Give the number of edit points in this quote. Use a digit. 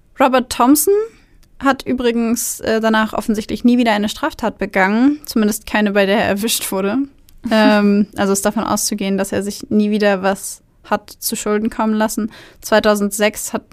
0